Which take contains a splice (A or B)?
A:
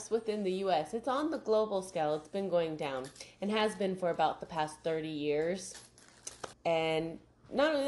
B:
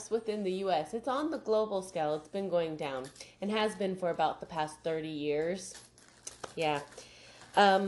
A